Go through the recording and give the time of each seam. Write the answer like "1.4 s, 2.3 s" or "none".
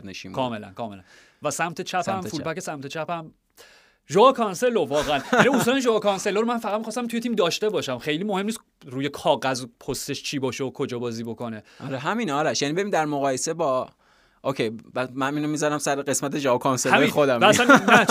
none